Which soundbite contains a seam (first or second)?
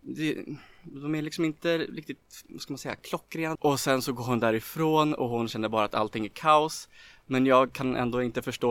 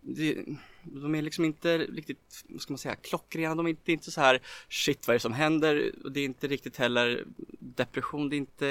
first